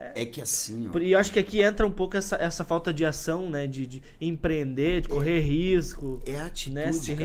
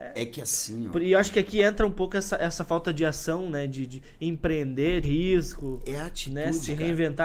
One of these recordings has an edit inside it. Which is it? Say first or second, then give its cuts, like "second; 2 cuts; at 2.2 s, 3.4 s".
second; 1 cut; at 5.0 s